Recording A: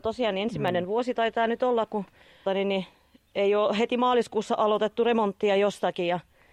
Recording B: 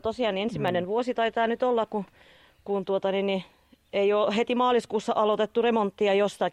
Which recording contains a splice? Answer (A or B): A